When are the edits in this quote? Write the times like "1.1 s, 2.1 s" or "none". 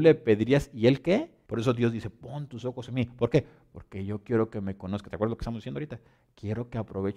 1.5 s